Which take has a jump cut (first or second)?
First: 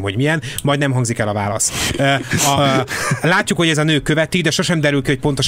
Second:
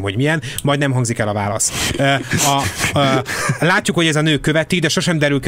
first